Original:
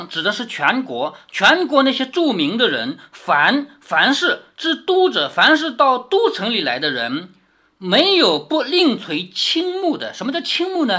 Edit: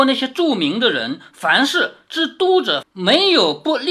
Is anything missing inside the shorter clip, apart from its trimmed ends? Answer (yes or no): yes